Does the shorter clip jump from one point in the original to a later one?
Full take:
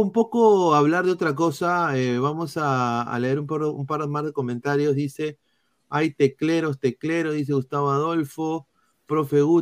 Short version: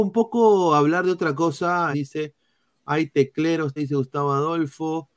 yes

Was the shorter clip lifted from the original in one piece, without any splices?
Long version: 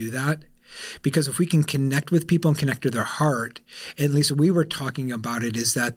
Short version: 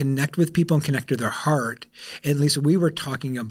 yes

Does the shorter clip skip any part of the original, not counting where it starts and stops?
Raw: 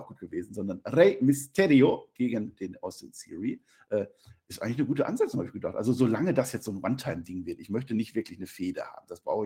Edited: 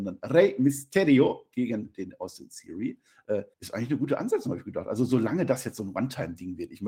yes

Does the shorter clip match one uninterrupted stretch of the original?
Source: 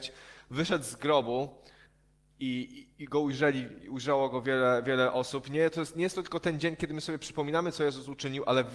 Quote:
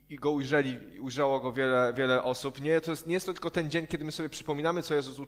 yes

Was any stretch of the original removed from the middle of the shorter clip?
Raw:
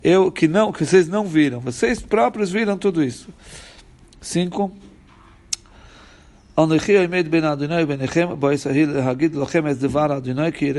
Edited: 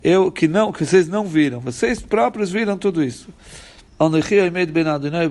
yes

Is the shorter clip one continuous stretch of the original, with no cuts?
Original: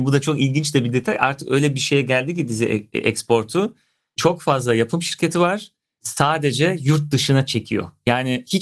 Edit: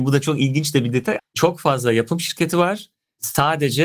no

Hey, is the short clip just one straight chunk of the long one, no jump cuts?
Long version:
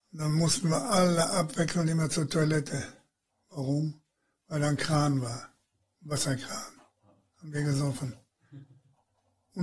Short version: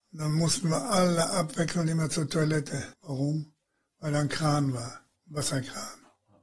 no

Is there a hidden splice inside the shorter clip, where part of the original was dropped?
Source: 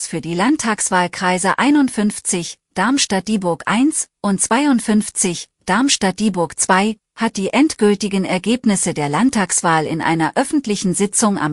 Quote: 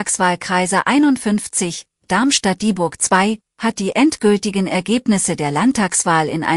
yes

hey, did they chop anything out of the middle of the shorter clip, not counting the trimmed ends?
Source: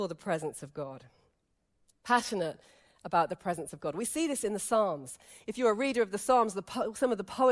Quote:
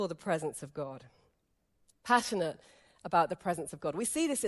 no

